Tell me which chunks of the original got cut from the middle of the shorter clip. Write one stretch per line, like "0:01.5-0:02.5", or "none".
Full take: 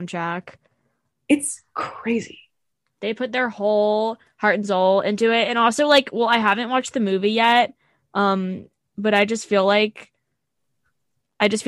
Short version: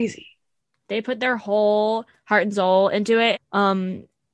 0:05.5-0:07.9